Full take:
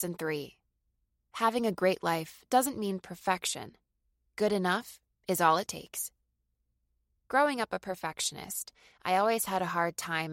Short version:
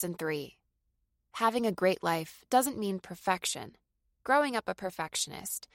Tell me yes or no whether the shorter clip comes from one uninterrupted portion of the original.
no